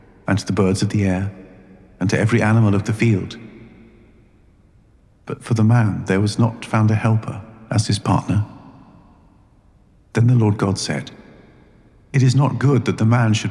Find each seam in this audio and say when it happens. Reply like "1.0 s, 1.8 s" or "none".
10.0 s